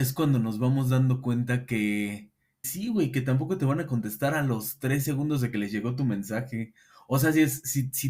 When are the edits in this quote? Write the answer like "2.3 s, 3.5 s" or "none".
2.6 s